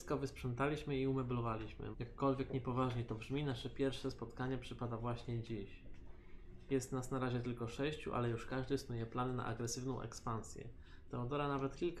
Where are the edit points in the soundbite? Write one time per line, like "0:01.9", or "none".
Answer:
0:01.9
0:11.1